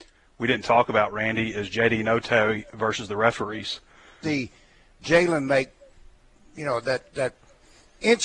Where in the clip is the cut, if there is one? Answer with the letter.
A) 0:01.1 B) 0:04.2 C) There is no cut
B